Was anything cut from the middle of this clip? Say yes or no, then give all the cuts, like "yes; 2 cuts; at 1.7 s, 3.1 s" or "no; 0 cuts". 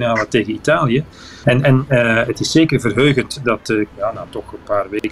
yes; 2 cuts; at 1.4 s, 3.9 s